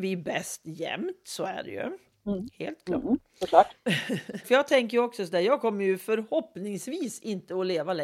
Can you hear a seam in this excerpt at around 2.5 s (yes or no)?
no